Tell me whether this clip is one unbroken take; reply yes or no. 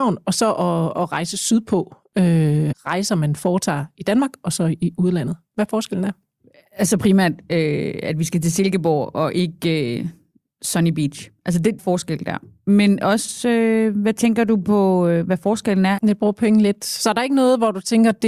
no